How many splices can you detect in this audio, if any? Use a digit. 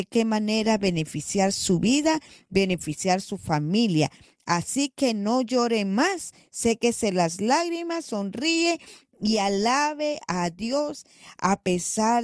0